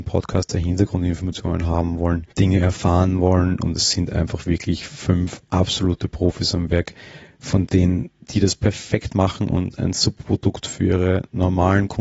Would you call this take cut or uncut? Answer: cut